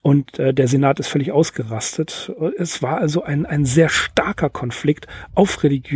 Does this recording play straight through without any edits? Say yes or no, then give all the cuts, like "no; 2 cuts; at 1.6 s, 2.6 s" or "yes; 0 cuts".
yes; 0 cuts